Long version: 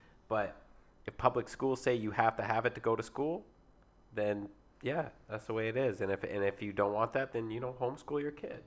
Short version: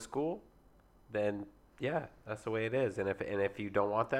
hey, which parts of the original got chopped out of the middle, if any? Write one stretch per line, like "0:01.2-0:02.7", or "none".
none